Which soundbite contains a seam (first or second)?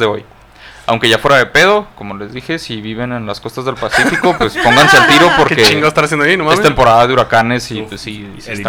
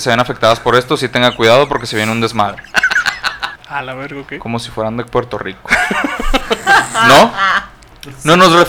second